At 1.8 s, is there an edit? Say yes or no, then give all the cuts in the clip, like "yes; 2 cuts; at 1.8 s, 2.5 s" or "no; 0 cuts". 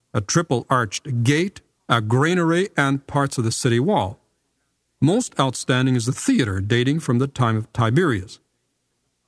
yes; 1 cut; at 1.8 s